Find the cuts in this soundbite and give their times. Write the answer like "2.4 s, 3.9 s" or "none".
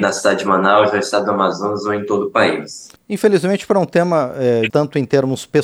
3.0 s, 4.7 s